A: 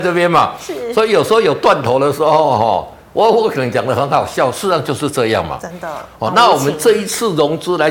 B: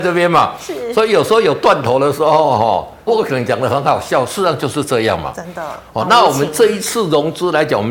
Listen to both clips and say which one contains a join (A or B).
B